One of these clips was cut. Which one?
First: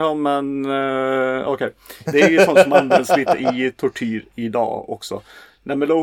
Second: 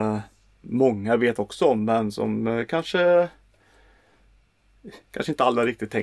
first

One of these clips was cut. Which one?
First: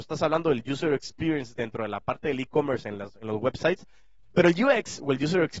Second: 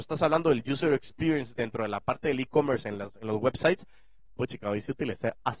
first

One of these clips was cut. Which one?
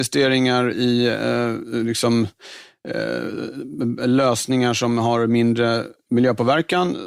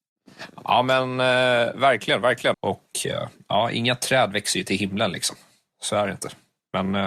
second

